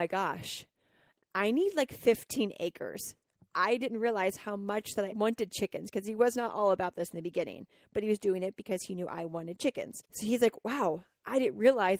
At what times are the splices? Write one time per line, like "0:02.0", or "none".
0:05.1
0:10.1